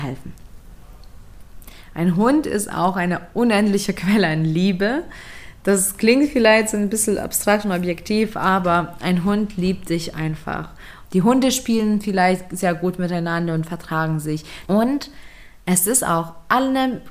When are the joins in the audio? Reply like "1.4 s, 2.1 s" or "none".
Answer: 11.1 s, 14.7 s